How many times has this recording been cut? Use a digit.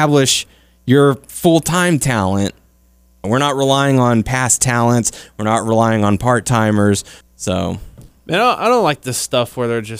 2